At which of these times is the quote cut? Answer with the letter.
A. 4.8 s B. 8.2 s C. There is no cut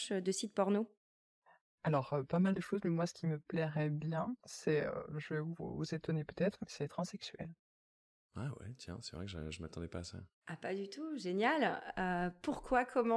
C